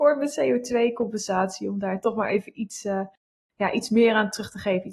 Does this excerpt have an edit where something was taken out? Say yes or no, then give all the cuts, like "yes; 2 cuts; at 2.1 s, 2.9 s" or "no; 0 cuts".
no; 0 cuts